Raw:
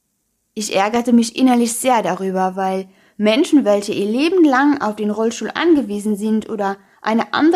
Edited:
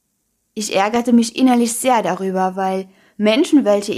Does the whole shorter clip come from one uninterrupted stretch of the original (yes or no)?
yes